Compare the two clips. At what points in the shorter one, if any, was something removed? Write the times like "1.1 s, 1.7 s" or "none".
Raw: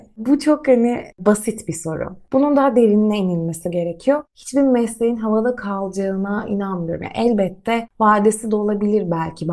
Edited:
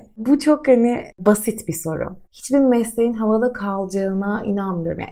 2.3 s